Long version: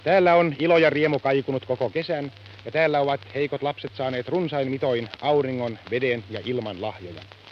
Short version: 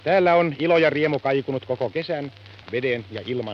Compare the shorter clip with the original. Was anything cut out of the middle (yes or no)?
yes